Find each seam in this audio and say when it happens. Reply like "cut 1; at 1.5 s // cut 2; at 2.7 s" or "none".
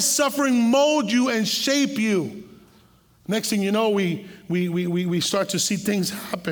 none